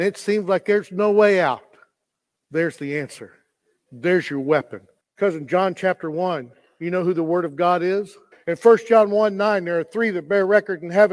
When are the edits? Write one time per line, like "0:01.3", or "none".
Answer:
0:05.0
0:08.3